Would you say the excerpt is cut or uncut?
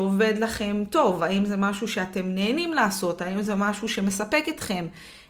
uncut